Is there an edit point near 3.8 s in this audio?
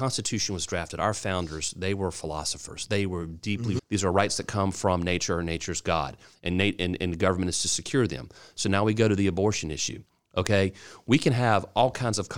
yes; 1 cut; at 3.8 s

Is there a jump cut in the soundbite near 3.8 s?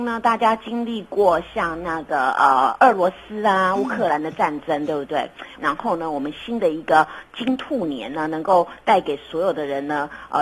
no; 1 cut; at 5.5 s

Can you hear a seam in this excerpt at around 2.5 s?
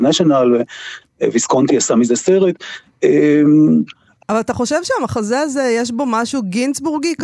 no; 1 cut; at 4.2 s

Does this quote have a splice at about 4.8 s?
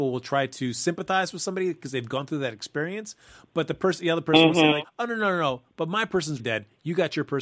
yes; 2 cuts; at 4.8 s, 6.4 s

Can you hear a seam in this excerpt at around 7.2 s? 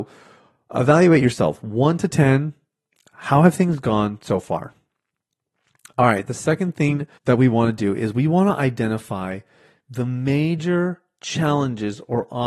yes; 1 cut; at 7.2 s

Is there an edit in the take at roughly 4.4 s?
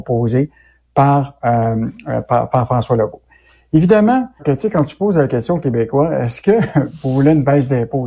yes; 1 cut; at 4.4 s

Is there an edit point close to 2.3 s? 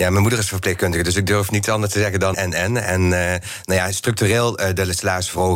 yes; 1 cut; at 2.3 s

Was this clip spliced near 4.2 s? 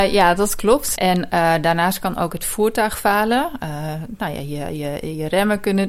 no; 1 cut; at 1.0 s

